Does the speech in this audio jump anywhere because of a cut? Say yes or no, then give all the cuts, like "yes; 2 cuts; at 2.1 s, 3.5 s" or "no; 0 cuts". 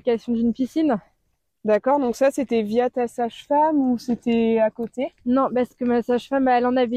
no; 0 cuts